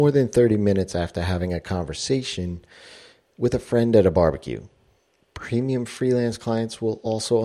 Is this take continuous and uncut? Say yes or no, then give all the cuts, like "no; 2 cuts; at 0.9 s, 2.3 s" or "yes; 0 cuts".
yes; 0 cuts